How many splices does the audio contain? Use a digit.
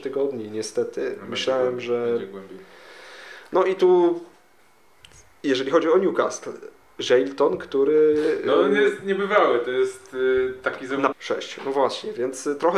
1